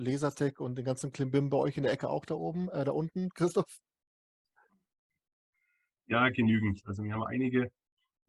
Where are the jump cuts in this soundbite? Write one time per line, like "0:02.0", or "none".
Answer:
none